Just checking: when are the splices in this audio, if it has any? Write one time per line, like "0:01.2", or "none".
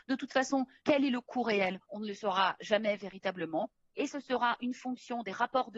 none